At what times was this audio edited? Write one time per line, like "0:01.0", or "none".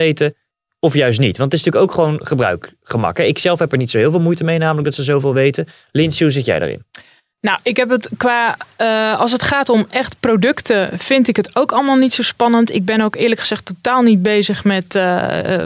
none